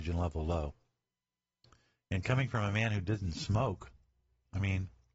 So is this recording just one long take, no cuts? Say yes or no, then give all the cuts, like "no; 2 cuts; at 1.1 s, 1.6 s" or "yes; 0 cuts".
yes; 0 cuts